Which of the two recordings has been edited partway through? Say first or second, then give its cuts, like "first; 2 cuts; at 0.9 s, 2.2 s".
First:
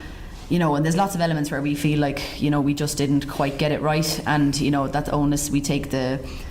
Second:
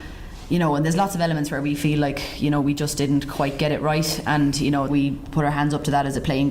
second; 1 cut; at 4.9 s